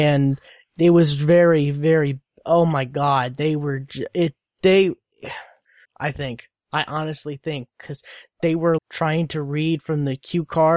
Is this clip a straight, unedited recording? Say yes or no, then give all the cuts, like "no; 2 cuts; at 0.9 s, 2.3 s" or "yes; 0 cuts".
no; 2 cuts; at 5.8 s, 8.8 s